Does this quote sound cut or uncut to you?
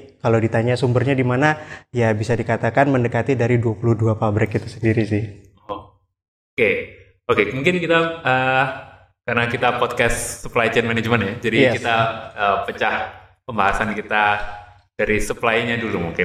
uncut